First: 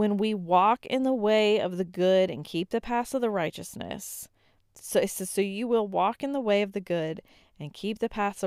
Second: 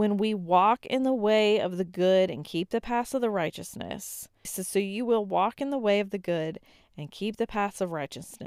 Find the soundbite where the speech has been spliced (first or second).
second